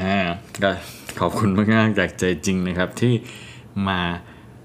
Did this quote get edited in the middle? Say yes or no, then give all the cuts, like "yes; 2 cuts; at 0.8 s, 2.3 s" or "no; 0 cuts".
no; 0 cuts